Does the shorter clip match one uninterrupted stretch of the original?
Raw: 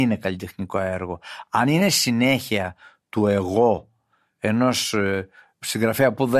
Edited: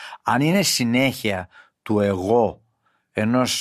yes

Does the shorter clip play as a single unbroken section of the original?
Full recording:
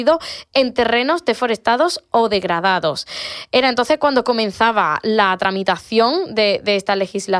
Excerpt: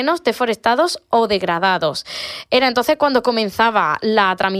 yes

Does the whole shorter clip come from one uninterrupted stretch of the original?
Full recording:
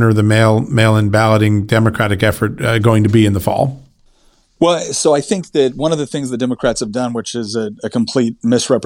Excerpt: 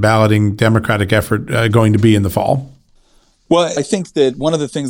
no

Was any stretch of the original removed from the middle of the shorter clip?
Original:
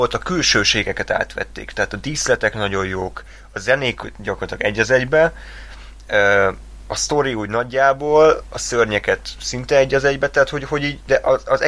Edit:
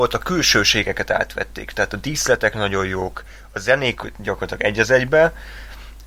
no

